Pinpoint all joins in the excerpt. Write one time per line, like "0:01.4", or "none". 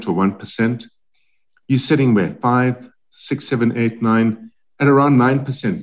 none

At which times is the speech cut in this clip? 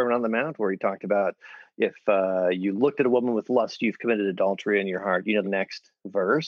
0:05.4

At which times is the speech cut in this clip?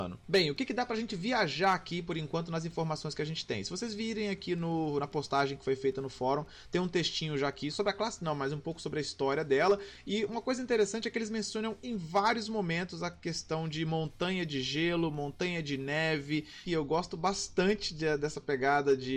0:07.7
0:16.6

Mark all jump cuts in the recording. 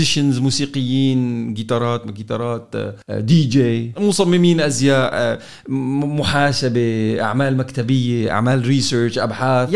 0:03.0

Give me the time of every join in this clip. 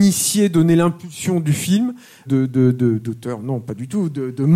0:02.3

